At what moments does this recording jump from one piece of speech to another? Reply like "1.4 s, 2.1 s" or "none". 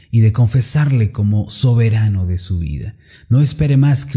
none

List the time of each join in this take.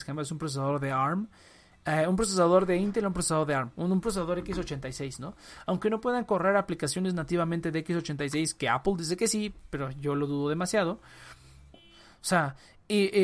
11.7 s

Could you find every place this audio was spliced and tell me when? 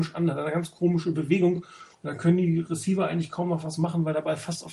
none

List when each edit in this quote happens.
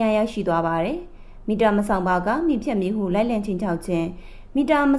none

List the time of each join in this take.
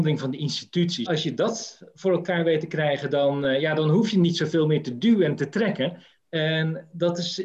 1.1 s, 6.2 s

